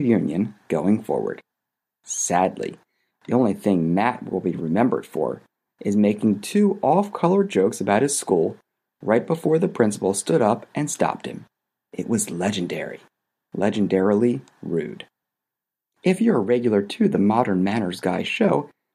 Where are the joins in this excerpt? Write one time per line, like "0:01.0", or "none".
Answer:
none